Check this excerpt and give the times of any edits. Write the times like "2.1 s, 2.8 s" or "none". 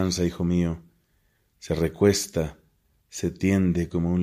none